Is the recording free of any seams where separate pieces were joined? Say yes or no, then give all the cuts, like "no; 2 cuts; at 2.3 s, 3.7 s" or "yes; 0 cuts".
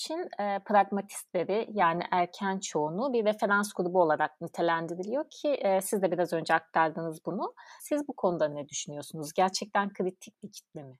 no; 1 cut; at 7.8 s